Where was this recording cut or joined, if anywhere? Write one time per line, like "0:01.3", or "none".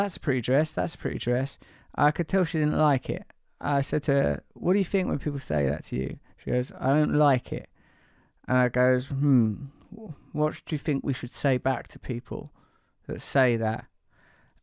none